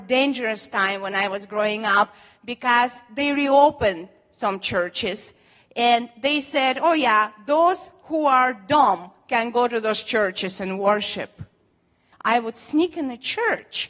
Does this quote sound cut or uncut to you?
cut